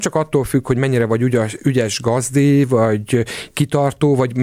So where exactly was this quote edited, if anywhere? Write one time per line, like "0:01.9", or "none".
none